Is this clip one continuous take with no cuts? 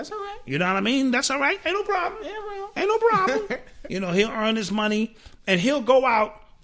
yes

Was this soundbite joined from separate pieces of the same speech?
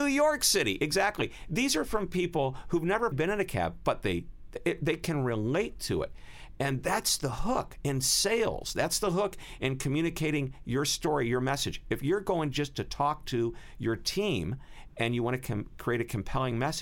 yes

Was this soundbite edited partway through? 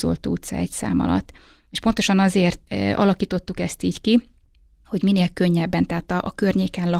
yes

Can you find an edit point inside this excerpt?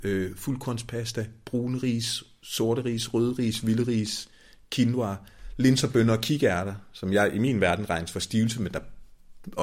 no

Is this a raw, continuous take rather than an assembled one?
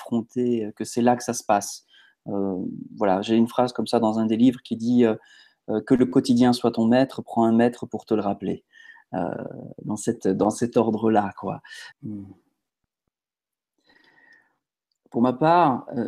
no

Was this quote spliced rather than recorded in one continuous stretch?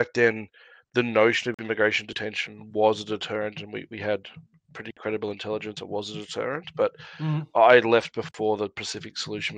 no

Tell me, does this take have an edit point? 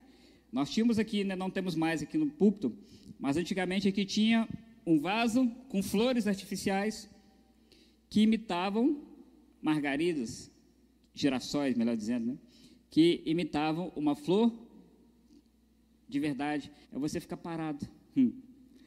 yes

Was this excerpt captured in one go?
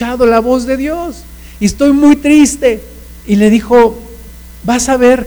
no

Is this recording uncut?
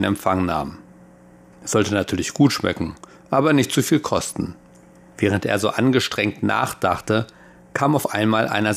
no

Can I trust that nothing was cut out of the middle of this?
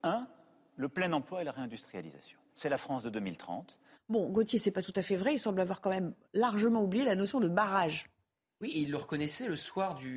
no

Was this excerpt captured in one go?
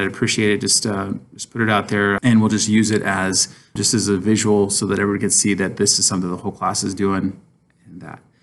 no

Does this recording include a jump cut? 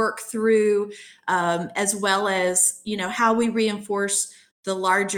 no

